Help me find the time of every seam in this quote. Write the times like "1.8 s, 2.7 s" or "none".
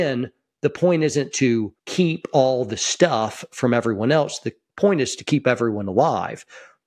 1.8 s